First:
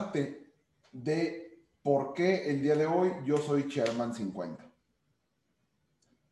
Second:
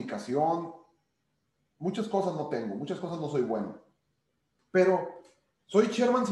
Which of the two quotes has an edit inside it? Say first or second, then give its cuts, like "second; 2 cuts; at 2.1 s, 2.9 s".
second; 1 cut; at 4.6 s